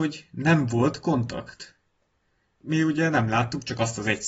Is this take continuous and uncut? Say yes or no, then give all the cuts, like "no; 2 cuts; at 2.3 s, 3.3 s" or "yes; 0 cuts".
yes; 0 cuts